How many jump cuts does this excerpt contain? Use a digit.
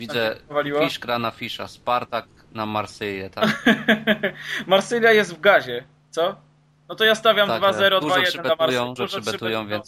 1